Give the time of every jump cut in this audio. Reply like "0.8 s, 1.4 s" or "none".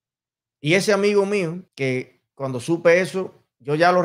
1.7 s